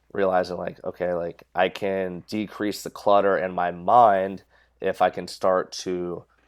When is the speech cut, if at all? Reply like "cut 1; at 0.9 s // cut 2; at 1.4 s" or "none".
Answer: none